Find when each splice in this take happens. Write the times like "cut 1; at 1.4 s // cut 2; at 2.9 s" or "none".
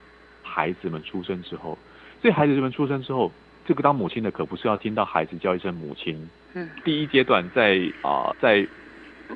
cut 1; at 6.8 s // cut 2; at 8.3 s